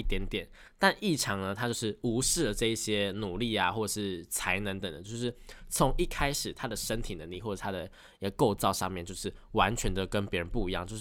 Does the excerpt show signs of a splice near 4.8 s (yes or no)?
yes